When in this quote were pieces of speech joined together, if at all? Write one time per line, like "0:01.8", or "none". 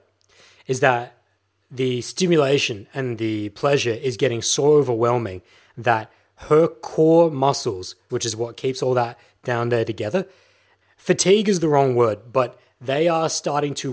0:08.1
0:10.8